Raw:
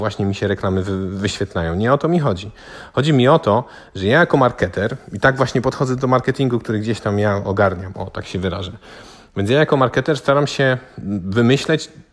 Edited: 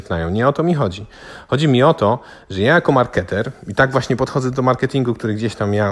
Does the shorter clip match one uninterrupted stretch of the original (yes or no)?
yes